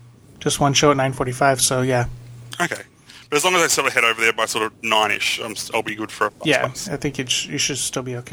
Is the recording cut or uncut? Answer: uncut